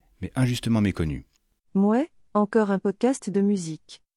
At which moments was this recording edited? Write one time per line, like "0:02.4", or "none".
0:01.6